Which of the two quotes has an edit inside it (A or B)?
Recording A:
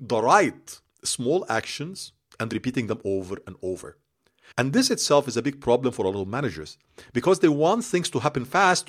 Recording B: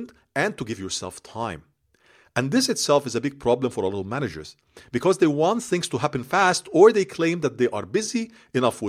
A